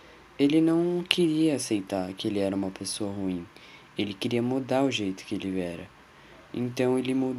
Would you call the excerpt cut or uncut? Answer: uncut